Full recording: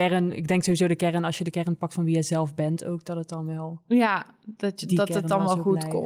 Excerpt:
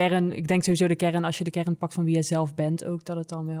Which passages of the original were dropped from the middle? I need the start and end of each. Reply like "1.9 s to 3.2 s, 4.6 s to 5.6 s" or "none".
none